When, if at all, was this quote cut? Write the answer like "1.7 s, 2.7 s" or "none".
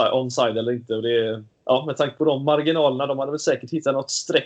1.5 s